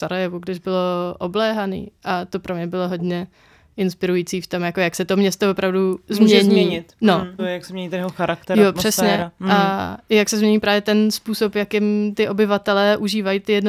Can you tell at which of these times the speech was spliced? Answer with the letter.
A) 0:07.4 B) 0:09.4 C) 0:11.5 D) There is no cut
A